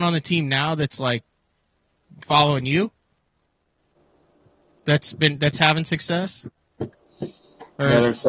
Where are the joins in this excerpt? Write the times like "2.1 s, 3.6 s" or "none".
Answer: none